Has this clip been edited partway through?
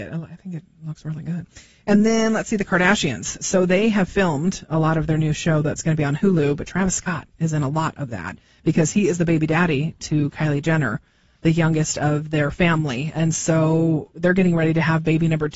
no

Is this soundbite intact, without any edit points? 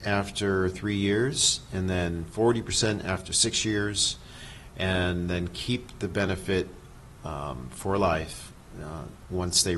yes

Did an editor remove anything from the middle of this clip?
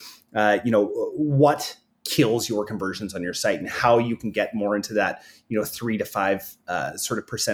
no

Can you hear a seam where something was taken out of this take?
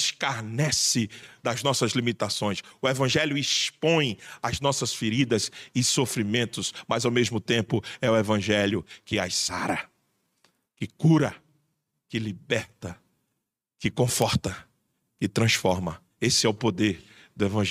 no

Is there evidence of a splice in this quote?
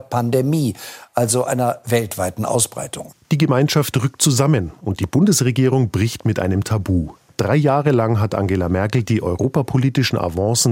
no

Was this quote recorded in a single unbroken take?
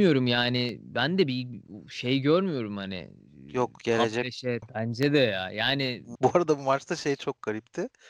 no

